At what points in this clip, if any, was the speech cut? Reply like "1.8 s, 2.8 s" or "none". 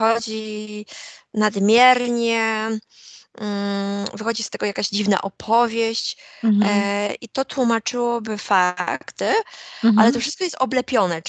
9.2 s